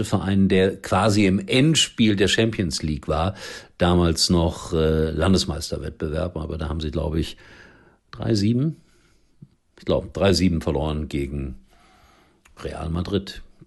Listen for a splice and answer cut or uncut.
uncut